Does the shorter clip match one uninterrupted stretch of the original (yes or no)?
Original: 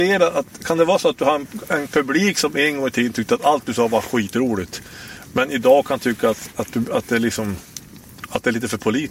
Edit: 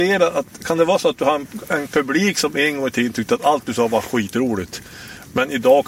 yes